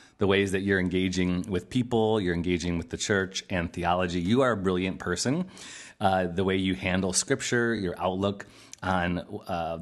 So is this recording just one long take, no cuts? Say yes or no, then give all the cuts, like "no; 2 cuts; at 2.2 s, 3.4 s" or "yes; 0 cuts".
yes; 0 cuts